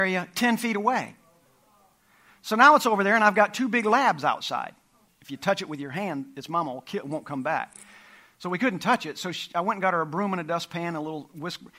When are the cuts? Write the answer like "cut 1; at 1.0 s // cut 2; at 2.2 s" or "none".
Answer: cut 1; at 5.1 s